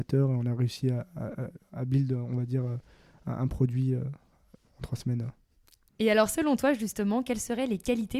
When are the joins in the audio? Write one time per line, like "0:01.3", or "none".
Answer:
none